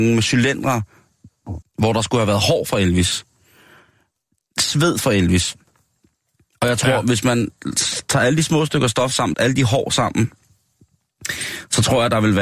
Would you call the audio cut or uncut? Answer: cut